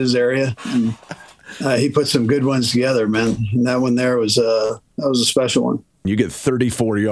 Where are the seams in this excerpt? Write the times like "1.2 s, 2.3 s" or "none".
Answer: 6.0 s